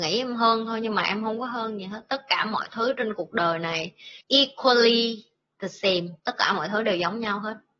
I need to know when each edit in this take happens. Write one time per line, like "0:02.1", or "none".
0:04.2
0:06.2